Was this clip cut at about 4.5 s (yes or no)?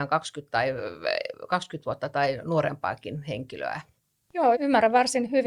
yes